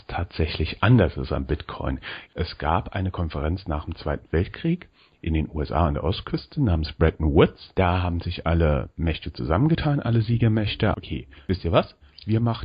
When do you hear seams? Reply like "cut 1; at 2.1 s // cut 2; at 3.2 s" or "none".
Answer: cut 1; at 2.2 s // cut 2; at 10.9 s